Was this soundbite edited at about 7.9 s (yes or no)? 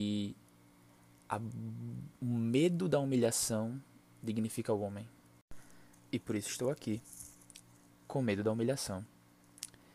yes